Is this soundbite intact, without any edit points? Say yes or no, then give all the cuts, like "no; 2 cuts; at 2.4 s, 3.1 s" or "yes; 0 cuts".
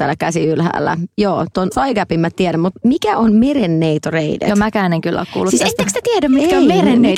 yes; 0 cuts